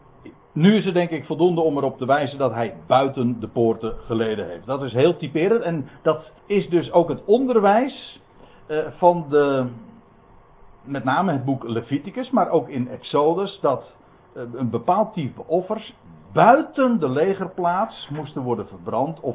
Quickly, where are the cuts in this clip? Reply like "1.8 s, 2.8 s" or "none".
6.4 s

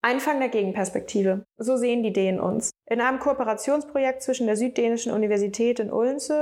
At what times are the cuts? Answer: none

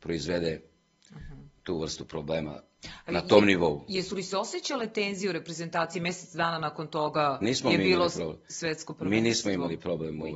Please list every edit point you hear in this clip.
none

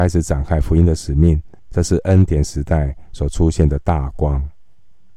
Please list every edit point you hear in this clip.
1.6 s

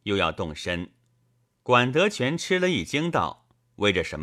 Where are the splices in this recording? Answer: 1.4 s

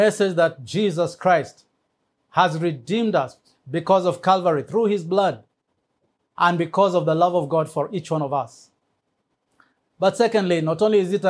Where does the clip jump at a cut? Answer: none

